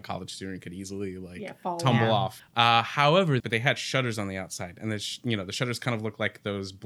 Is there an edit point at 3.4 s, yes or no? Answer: yes